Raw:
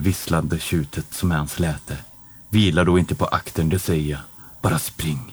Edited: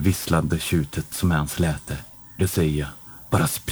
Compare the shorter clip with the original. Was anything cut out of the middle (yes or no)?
yes